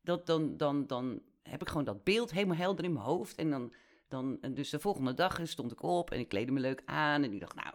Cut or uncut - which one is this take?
uncut